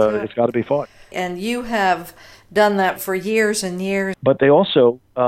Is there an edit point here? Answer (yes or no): yes